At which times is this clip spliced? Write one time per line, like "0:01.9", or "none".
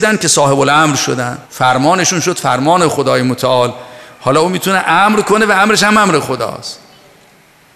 0:01.4